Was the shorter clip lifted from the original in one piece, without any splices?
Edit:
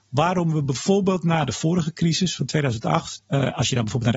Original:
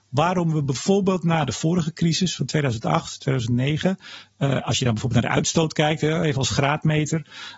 no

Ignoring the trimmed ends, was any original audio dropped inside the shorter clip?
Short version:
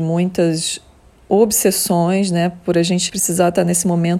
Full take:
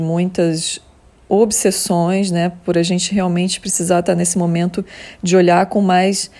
yes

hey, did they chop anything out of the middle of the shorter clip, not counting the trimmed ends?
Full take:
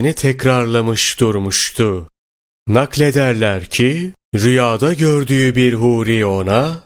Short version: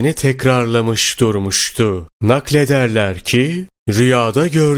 yes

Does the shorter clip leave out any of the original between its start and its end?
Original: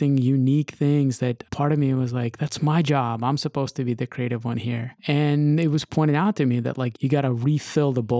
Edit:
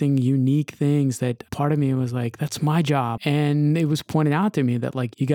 yes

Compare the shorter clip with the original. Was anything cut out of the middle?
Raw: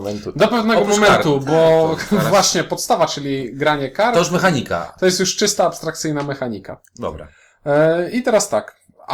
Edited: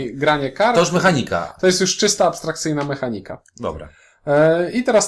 no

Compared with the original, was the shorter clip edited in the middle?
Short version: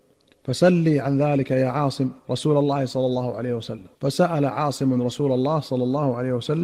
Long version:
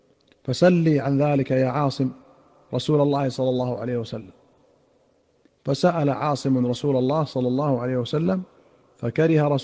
yes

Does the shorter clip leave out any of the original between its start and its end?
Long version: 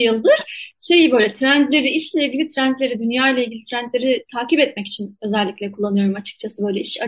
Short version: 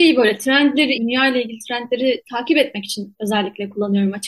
yes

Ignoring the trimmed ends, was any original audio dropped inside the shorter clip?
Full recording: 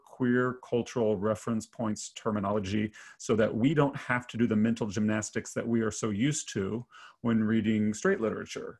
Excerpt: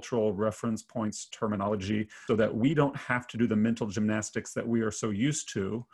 yes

